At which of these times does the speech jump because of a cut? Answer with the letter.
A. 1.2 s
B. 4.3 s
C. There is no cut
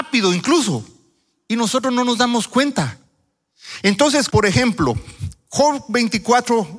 B